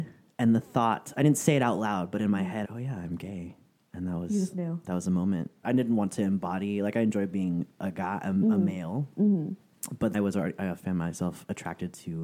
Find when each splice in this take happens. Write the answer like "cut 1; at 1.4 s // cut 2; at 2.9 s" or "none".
cut 1; at 2.6 s // cut 2; at 5.6 s // cut 3; at 10.1 s